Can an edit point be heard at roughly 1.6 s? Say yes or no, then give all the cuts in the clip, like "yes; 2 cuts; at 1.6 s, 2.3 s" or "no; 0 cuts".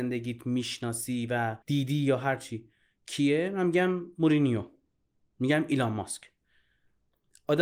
yes; 1 cut; at 1.6 s